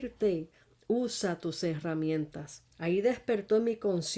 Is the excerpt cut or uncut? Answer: cut